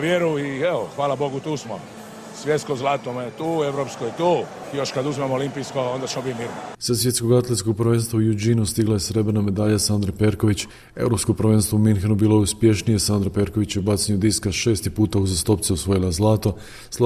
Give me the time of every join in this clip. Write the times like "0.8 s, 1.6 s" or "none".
none